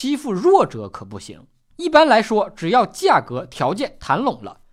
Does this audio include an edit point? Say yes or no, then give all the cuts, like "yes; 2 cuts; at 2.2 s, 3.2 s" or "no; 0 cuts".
yes; 1 cut; at 1.7 s